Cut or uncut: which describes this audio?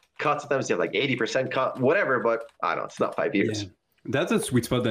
cut